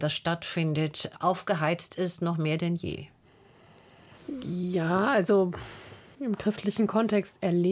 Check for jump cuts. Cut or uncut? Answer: uncut